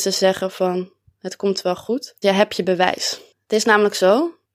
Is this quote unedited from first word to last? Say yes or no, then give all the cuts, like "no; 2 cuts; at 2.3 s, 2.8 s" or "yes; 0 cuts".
no; 1 cut; at 2.2 s